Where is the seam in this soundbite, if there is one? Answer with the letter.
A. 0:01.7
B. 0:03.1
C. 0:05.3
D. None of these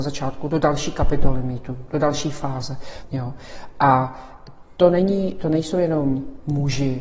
B